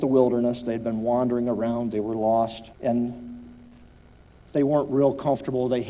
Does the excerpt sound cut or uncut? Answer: cut